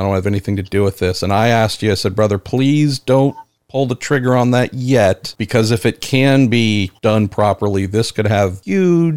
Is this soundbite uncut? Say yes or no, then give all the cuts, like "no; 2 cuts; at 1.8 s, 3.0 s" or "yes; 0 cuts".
no; 1 cut; at 5.4 s